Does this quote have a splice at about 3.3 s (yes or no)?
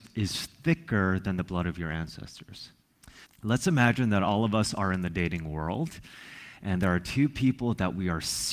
yes